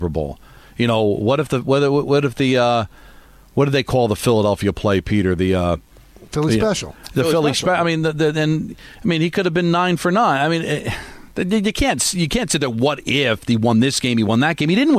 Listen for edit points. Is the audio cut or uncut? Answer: uncut